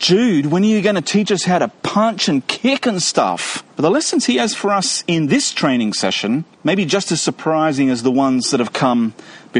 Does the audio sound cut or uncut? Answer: cut